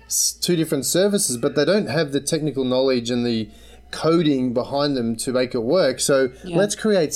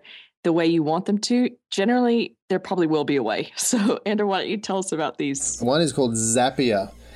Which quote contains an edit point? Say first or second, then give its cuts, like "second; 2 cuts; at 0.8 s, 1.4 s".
second; 1 cut; at 5.6 s